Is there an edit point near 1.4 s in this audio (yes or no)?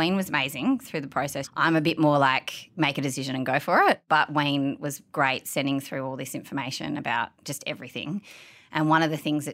yes